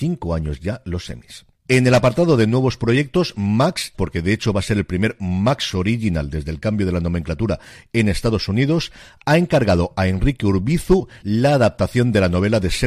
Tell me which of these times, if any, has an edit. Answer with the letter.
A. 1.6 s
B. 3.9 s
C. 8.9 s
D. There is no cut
B